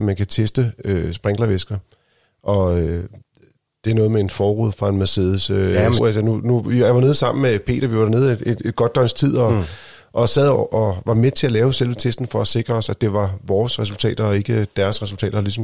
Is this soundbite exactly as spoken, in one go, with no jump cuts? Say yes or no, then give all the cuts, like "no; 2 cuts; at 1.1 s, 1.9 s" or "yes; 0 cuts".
no; 1 cut; at 6.0 s